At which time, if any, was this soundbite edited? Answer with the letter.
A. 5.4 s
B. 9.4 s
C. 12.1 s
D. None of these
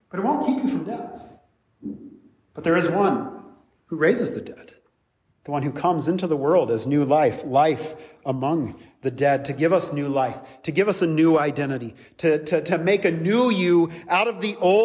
D